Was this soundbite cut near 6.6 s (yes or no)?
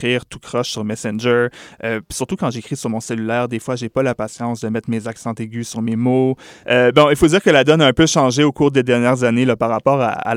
yes